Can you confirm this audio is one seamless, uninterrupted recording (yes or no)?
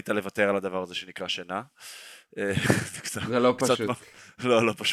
yes